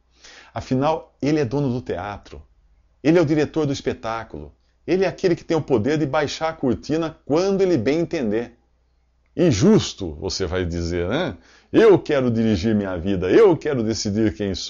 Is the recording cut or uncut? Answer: uncut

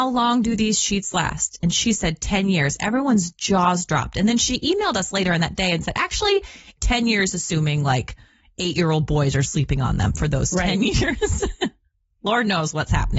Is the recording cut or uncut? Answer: cut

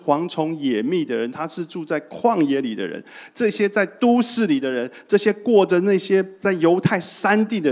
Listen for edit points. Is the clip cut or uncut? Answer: uncut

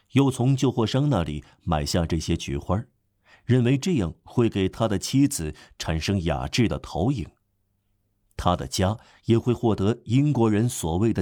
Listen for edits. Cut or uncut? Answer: uncut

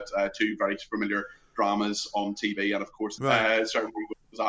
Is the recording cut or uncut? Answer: cut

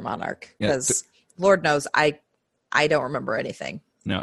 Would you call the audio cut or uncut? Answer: uncut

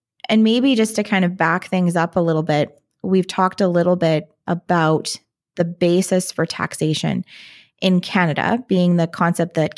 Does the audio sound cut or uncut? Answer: uncut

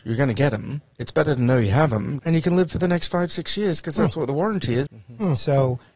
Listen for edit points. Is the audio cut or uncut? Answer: cut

